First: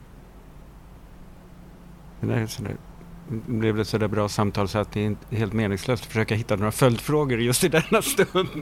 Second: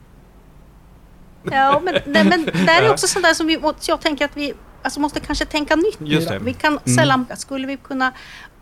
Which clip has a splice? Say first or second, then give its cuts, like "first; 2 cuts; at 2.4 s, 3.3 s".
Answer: second; 2 cuts; at 1.4 s, 7.3 s